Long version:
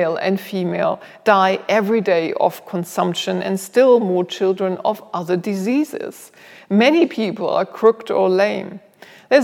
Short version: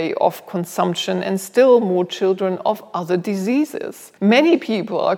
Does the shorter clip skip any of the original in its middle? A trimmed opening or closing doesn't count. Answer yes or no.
yes